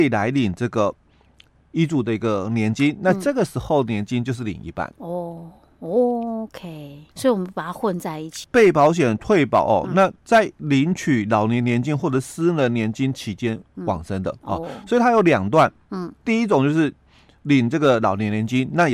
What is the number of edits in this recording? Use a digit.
2